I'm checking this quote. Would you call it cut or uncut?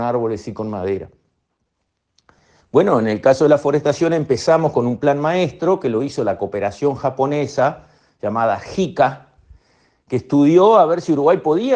uncut